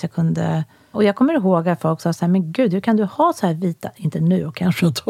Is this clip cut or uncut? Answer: cut